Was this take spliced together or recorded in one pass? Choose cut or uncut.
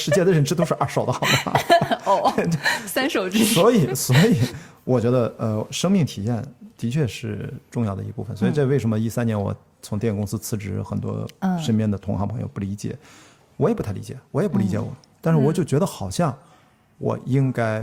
uncut